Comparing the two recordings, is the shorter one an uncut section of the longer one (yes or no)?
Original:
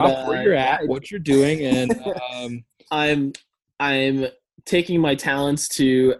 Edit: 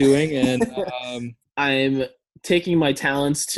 no